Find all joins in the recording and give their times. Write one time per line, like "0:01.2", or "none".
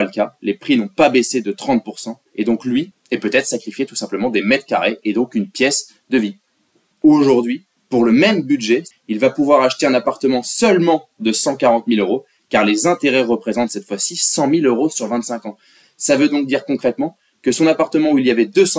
0:02.9
0:06.9
0:08.9